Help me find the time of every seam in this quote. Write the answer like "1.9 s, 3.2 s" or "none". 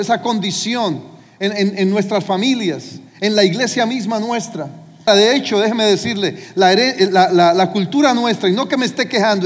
5.1 s